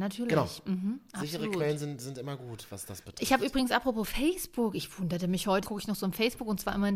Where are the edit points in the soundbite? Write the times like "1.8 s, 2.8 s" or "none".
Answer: 1.1 s, 5.6 s

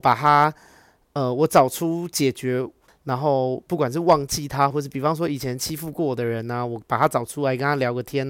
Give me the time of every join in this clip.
2.9 s, 4.7 s

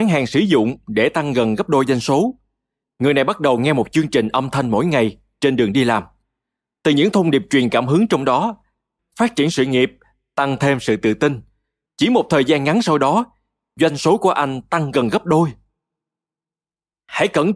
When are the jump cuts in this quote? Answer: 9.0 s, 11.9 s

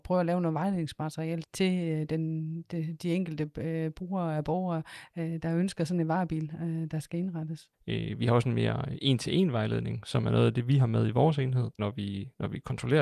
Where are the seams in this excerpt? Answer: 1.4 s, 7.7 s, 11.8 s

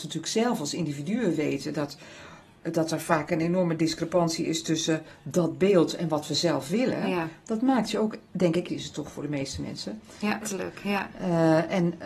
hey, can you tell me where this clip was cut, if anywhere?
8.7 s, 10.4 s

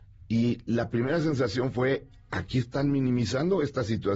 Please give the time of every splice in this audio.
none

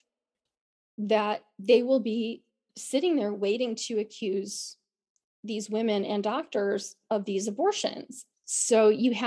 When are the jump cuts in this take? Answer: 8.3 s

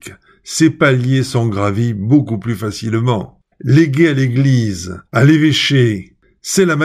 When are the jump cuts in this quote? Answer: 3.5 s, 5.1 s

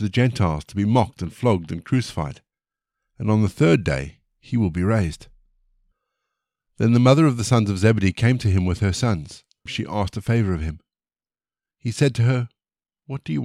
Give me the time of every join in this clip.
9.7 s

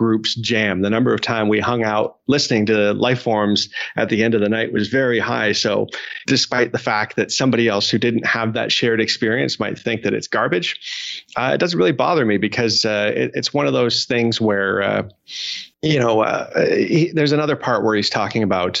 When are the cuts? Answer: 6.3 s, 15.7 s

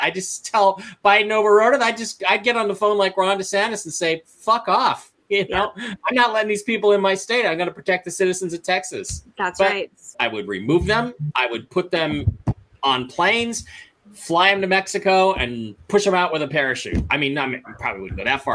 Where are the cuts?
10.1 s

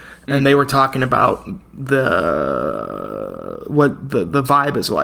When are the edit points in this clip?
none

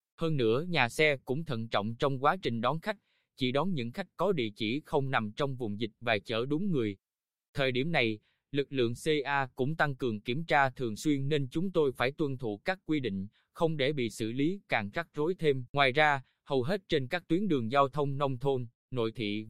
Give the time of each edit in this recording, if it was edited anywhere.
15.7 s

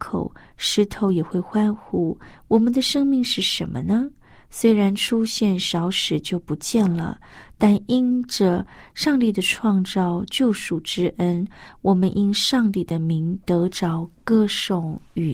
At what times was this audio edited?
none

